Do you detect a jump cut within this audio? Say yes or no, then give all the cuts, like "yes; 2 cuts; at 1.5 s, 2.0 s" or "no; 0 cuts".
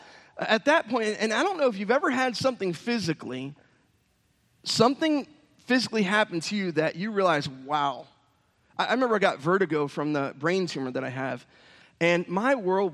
no; 0 cuts